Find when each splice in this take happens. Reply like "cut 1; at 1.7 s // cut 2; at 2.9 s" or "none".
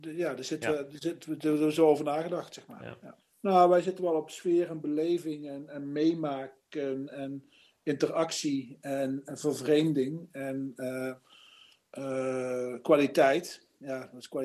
cut 1; at 3.2 s